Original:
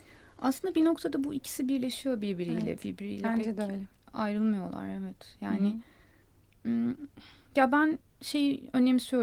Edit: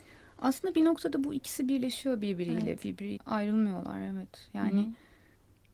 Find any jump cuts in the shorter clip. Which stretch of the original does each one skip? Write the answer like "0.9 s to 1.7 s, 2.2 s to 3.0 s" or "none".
3.2 s to 4.0 s